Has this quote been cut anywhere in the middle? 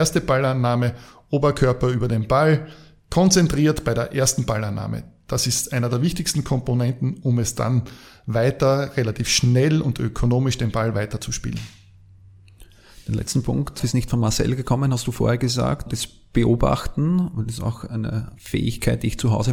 yes; 2 cuts; at 13.8 s, 15.9 s

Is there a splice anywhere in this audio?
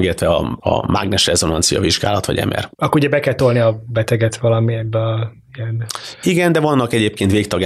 yes; 1 cut; at 2.7 s

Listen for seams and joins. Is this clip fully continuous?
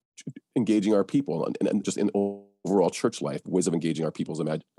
no; 1 cut; at 1.8 s

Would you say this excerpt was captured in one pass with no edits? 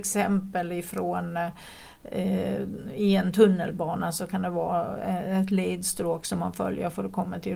yes; 0 cuts

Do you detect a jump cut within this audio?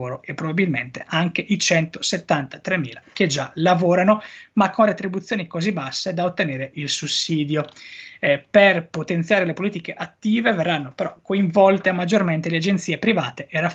no; 0 cuts

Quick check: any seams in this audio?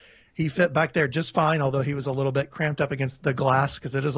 yes; 1 cut; at 3.2 s

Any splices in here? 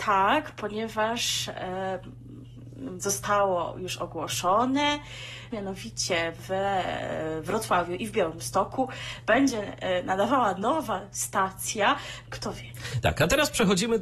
yes; 2 cuts; at 5.5 s, 12.3 s

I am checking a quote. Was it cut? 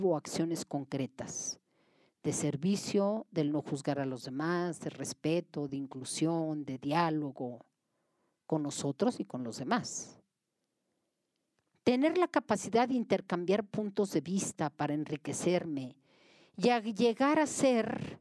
no; 0 cuts

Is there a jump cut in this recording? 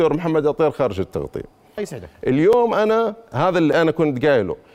yes; 1 cut; at 1.8 s

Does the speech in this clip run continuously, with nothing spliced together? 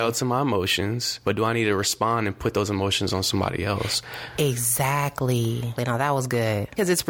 no; 1 cut; at 5.8 s

